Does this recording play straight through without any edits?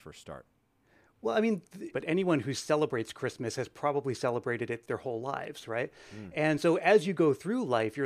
no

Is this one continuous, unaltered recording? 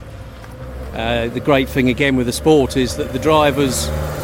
yes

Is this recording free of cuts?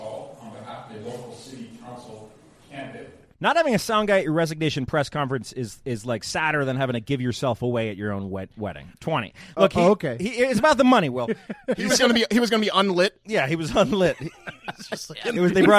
no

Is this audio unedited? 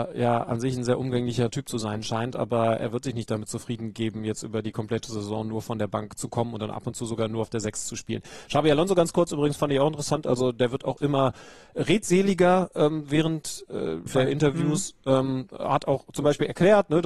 no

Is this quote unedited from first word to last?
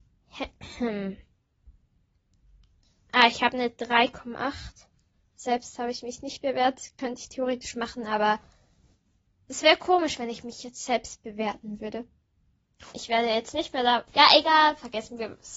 no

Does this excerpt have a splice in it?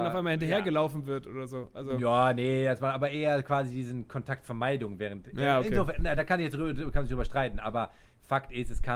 no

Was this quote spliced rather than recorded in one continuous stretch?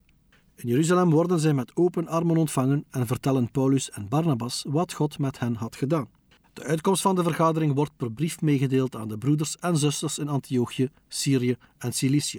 yes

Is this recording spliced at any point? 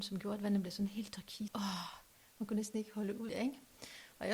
yes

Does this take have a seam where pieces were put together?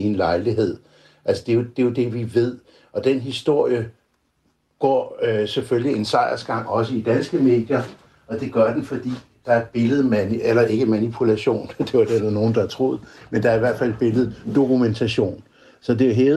no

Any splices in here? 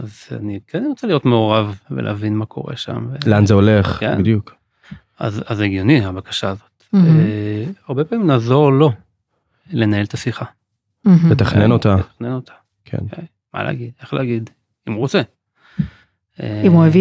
no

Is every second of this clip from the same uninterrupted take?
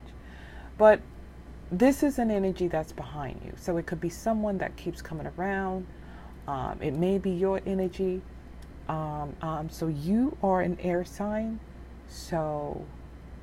no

